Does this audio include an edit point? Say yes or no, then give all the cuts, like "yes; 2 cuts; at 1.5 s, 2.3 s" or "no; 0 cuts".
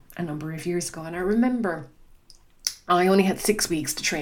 no; 0 cuts